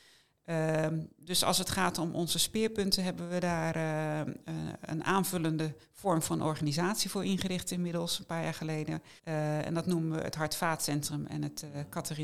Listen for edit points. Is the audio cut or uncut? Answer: cut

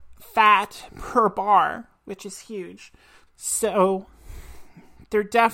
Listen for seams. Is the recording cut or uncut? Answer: cut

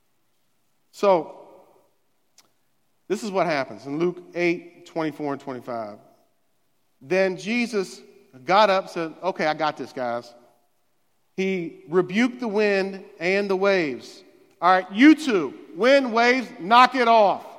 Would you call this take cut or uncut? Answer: uncut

